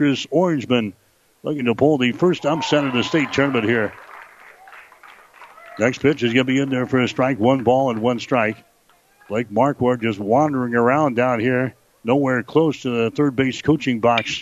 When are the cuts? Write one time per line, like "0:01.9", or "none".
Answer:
none